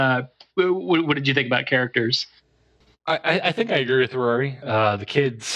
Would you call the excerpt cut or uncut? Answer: cut